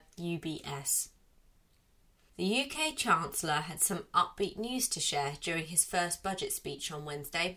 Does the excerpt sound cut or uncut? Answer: uncut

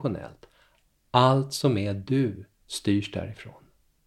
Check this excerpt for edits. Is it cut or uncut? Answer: uncut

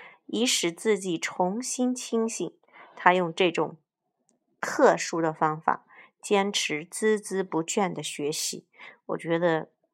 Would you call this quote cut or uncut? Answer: uncut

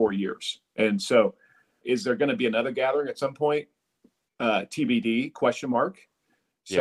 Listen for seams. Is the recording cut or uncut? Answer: cut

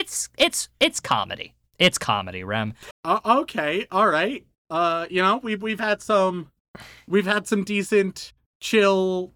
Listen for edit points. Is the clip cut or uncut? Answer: cut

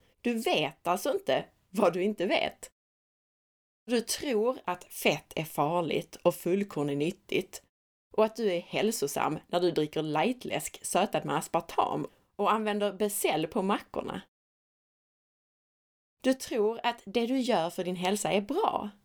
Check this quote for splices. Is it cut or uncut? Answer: uncut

